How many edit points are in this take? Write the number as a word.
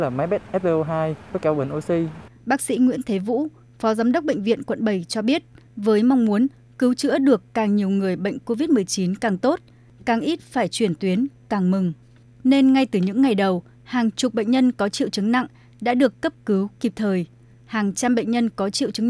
one